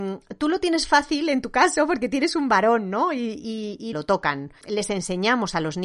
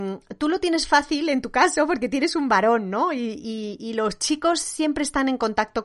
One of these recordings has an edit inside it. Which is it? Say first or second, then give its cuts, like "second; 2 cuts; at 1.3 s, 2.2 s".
first; 1 cut; at 3.9 s